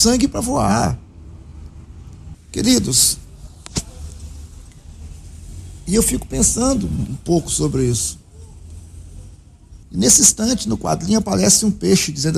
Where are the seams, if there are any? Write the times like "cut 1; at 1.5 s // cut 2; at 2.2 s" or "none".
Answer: cut 1; at 2.3 s // cut 2; at 9.8 s